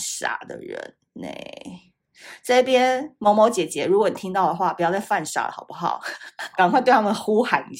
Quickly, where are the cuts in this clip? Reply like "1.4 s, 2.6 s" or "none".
6.5 s